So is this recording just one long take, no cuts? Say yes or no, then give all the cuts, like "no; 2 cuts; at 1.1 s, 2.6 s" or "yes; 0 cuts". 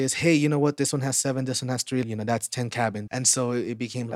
no; 2 cuts; at 2.0 s, 3.1 s